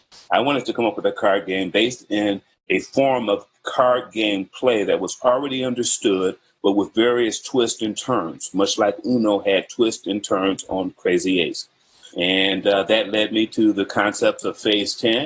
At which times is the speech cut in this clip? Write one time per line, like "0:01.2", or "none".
0:02.5
0:12.1